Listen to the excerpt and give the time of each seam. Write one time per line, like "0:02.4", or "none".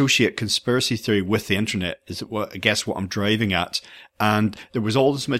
none